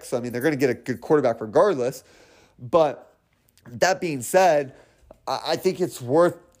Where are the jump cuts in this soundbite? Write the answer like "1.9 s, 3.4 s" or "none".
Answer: none